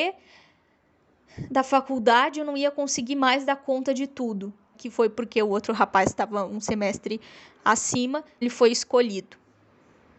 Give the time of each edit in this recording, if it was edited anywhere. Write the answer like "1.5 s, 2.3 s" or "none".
4.7 s, 8.4 s